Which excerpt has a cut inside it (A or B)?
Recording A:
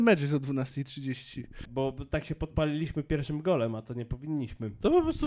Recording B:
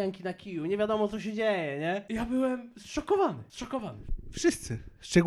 A